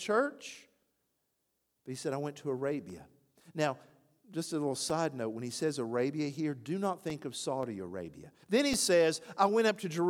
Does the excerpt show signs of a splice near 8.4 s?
yes; 1 cut; at 8.4 s

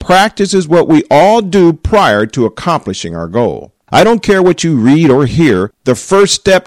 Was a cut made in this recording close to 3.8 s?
yes; 1 cut; at 3.8 s

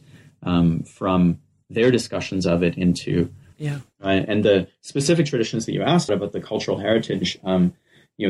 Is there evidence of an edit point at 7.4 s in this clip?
no; 2 cuts; at 3.5 s, 6.1 s

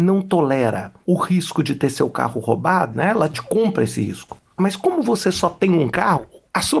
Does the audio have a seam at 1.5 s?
no; 2 cuts; at 2.9 s, 4.6 s

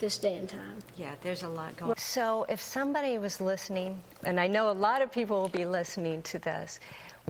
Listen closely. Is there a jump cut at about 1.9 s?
yes; 1 cut; at 1.9 s

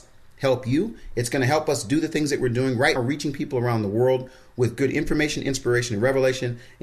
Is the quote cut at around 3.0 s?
yes; 1 cut; at 3.0 s

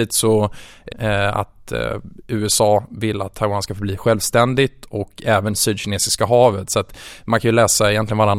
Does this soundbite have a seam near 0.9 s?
yes; 1 cut; at 0.9 s

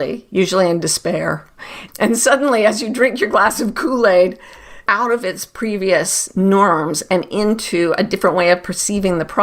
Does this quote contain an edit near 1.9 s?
yes; 2 cuts; at 1.9 s, 4.9 s

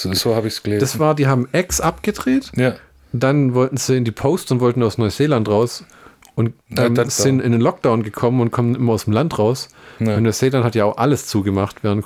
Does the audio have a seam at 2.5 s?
no; 1 cut; at 7.0 s

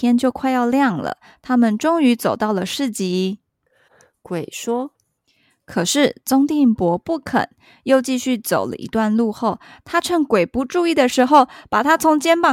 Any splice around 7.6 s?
no; 1 cut; at 3.9 s

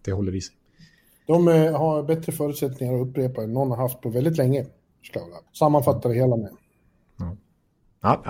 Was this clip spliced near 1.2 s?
no; 1 cut; at 5.5 s

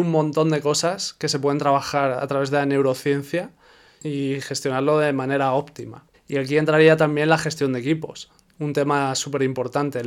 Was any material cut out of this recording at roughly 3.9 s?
no; 1 cut; at 6.1 s

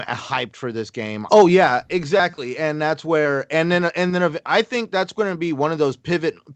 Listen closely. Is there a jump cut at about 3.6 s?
no; 1 cut; at 1.3 s

